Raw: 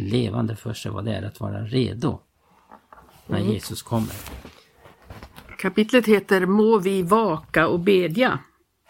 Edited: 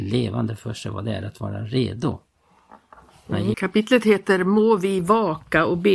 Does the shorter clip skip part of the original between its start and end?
yes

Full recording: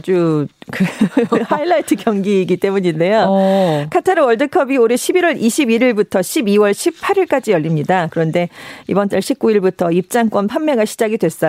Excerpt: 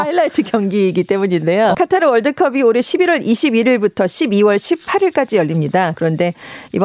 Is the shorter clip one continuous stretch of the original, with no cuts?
no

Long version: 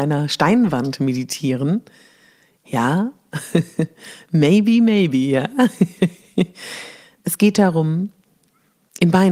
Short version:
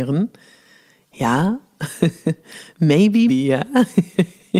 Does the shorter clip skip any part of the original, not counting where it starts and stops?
yes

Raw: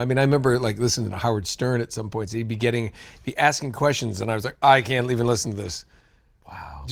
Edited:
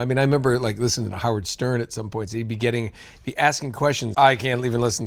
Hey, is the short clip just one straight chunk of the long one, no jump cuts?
no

